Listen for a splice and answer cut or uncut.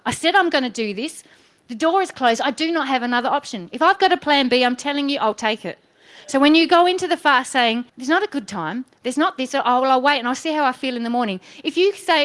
cut